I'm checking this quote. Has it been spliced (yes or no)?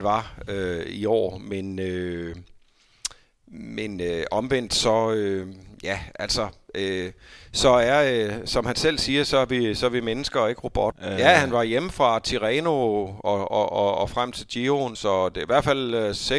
yes